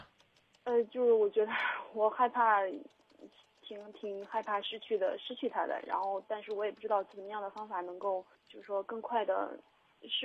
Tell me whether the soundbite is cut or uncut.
cut